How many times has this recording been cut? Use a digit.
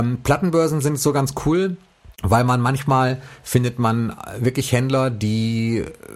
1